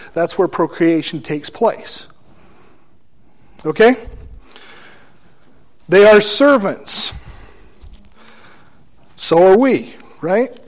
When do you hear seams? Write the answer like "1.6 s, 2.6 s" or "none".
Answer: none